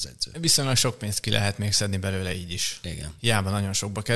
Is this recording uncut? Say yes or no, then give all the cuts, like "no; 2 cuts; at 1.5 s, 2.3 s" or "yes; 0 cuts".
yes; 0 cuts